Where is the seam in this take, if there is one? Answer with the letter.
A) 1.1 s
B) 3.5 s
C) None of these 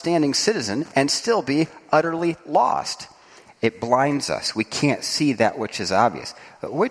B